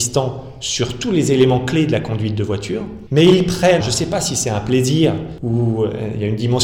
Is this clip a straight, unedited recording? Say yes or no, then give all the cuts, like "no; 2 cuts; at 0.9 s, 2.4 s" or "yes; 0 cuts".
no; 1 cut; at 3.8 s